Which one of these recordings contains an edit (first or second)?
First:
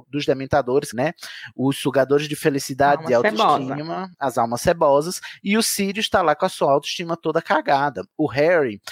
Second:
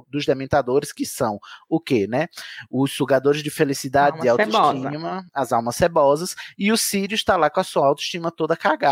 first